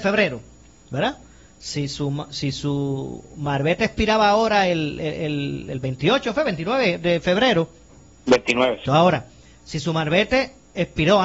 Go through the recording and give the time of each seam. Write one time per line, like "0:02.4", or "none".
0:08.9